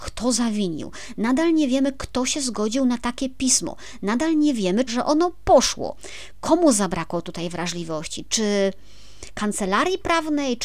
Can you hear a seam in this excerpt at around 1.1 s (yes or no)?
no